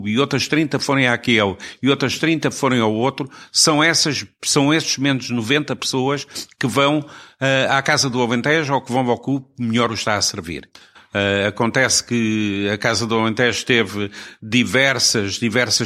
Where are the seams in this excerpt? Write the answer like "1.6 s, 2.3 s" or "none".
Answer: 11.0 s

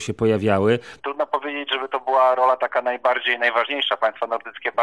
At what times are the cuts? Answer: 1.0 s

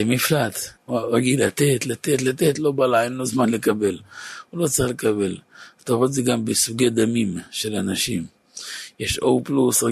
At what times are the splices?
none

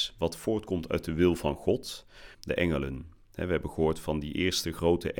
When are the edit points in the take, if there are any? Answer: 2.3 s

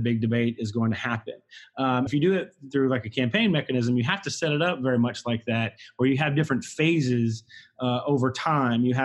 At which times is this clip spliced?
2.1 s

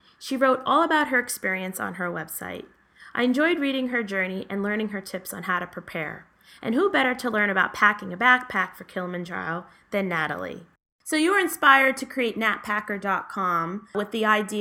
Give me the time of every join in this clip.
none

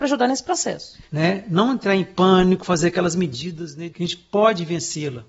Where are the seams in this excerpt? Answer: 1.1 s, 3.9 s

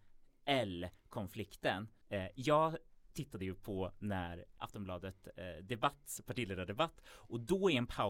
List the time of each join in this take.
2.0 s, 4.6 s

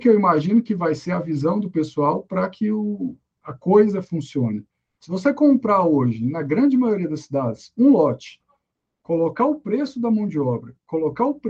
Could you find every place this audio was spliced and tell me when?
5.0 s

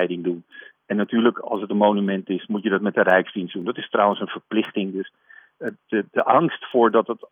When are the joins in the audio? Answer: none

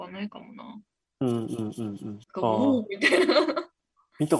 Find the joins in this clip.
1.2 s, 2.2 s

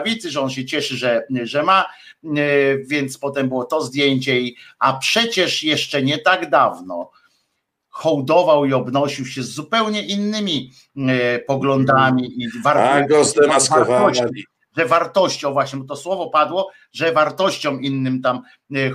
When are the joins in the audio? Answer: none

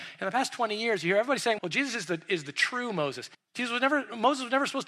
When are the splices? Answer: 1.6 s, 3.3 s

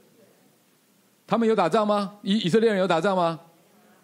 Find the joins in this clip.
none

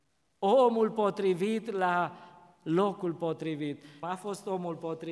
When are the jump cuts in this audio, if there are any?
4.0 s

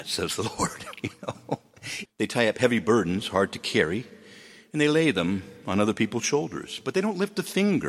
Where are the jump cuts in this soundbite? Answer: 2.0 s

